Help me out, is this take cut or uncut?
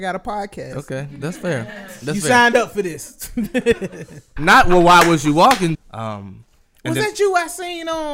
cut